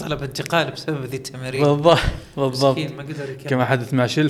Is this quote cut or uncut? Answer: uncut